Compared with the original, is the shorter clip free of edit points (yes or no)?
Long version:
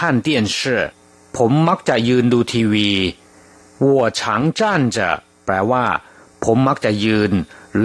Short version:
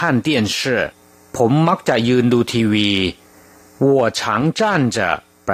yes